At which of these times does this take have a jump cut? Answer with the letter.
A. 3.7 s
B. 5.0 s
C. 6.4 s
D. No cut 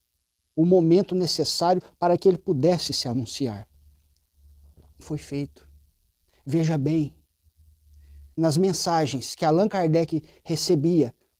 B